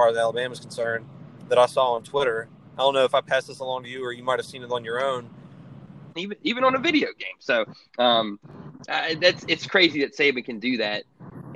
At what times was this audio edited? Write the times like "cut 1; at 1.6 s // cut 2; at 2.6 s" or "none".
cut 1; at 6.2 s